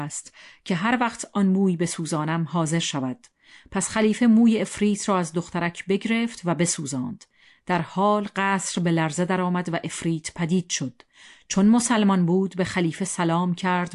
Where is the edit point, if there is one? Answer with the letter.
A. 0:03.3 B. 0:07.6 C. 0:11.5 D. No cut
D